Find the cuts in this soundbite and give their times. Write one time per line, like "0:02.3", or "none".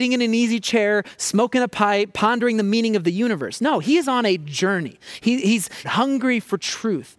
0:05.8